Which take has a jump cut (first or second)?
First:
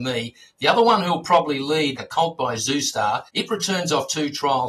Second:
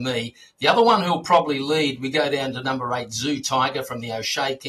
first